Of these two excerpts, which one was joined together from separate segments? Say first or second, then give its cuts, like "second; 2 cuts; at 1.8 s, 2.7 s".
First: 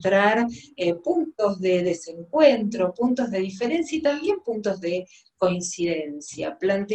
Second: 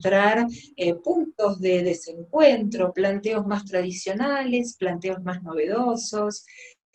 second; 1 cut; at 2.9 s